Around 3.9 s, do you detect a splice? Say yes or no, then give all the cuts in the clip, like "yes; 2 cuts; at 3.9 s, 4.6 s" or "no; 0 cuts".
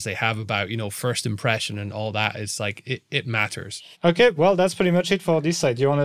yes; 1 cut; at 3.9 s